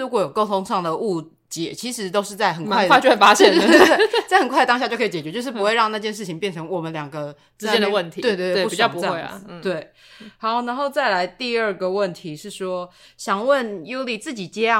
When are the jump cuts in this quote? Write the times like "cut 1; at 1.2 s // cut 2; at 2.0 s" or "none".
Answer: none